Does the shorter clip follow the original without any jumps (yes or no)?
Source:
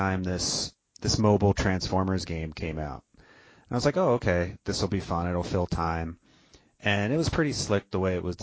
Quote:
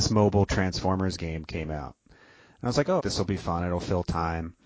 no